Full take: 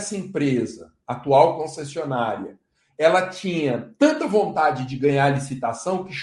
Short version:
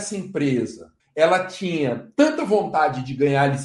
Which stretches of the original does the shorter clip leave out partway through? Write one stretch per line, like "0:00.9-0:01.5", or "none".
0:01.0-0:02.8